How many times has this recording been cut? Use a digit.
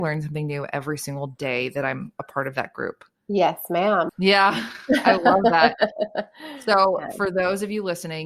1